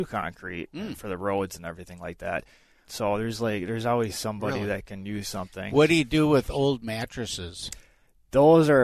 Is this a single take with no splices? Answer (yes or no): no